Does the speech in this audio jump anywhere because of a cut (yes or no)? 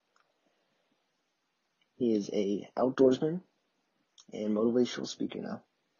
no